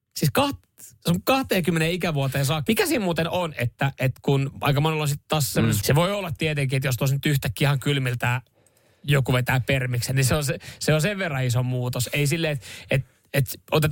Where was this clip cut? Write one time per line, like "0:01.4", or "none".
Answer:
0:02.7
0:05.8